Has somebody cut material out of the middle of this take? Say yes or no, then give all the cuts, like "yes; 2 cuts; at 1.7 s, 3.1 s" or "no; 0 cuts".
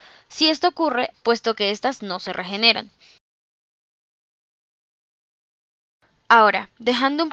yes; 1 cut; at 1.1 s